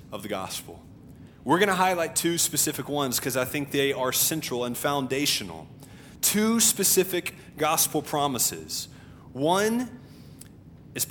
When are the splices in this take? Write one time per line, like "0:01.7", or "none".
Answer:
none